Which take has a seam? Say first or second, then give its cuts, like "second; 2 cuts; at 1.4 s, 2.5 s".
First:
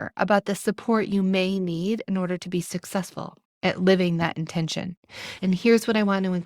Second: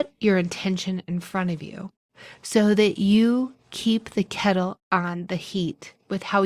first; 1 cut; at 5.4 s